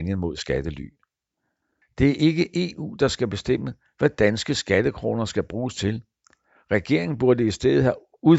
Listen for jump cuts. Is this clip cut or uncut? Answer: cut